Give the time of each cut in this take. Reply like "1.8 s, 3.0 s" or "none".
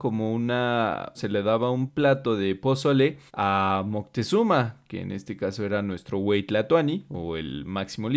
1.1 s, 3.3 s